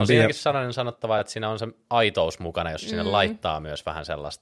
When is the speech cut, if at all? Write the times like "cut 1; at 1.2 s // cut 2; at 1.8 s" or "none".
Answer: none